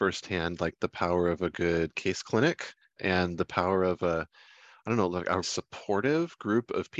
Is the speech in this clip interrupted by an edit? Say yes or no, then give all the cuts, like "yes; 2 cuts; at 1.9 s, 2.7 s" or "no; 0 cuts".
yes; 2 cuts; at 3.0 s, 5.4 s